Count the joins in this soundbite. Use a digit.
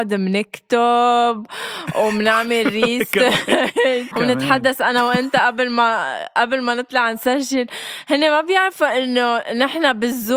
1